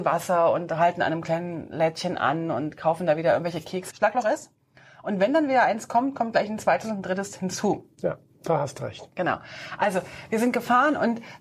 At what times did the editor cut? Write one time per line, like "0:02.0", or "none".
0:03.9